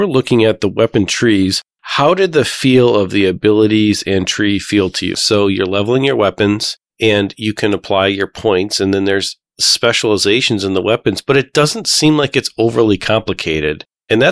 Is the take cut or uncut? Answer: cut